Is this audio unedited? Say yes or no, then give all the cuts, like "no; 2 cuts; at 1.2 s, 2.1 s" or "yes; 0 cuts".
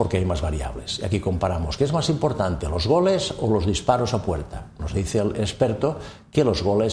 yes; 0 cuts